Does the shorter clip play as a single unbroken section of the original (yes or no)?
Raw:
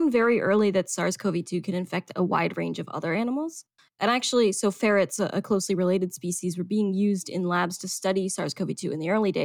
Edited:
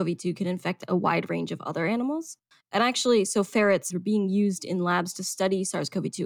no